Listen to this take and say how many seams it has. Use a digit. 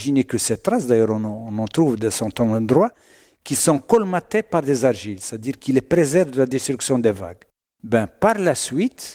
0